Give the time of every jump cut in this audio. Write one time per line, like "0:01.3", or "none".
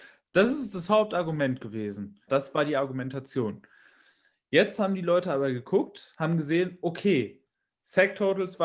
0:02.3

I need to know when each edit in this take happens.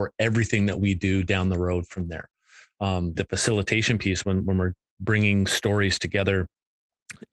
0:03.1

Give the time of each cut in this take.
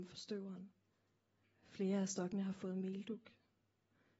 0:01.4

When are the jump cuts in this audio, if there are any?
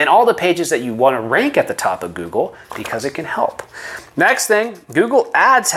none

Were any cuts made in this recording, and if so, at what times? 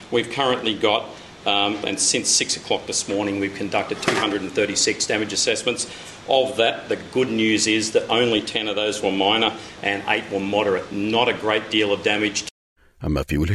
0:01.8
0:10.9

